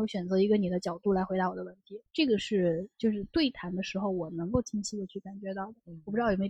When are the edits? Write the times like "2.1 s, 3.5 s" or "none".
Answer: 2.1 s